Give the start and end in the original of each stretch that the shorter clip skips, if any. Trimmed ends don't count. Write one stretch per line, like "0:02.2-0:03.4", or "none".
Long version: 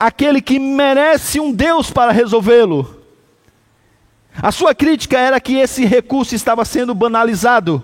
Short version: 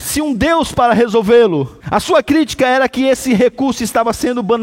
0:03.0-0:04.3